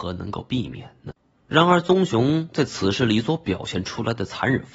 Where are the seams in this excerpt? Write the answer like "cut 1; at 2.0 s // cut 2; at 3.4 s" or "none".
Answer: cut 1; at 1.3 s